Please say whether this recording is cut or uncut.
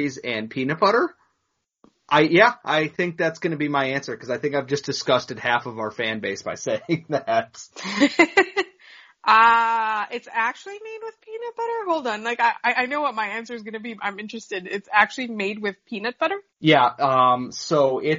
cut